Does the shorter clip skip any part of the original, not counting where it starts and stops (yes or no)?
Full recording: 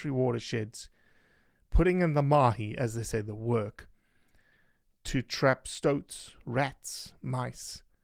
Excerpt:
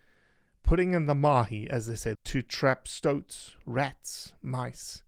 yes